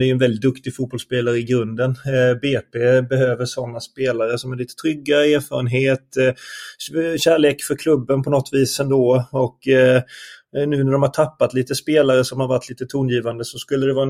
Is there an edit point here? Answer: no; 0 cuts

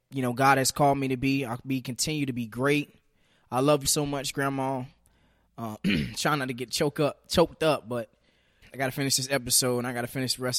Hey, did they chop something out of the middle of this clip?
yes; 2 cuts; at 3.8 s, 8.6 s

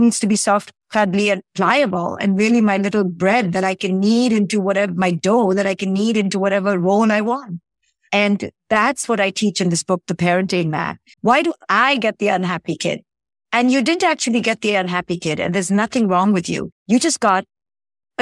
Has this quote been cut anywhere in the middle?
yes; 1 cut; at 11.1 s

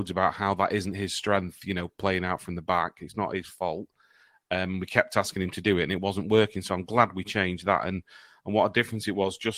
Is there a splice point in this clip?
no; 0 cuts

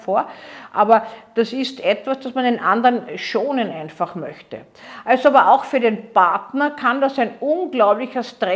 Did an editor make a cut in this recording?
no; 0 cuts

